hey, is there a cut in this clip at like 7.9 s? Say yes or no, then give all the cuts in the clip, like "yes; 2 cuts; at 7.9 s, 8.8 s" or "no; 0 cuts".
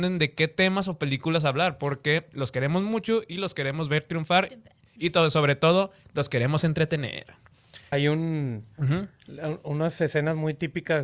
yes; 1 cut; at 7.9 s